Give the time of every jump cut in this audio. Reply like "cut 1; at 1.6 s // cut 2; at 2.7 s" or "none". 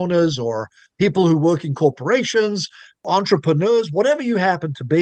none